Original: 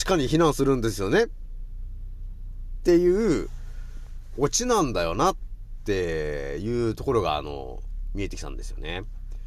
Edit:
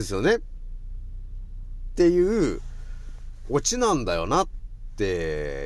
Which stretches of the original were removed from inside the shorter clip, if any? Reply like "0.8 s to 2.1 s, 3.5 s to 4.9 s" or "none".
none